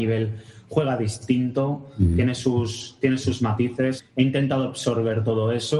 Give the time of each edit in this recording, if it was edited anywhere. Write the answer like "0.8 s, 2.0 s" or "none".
4.0 s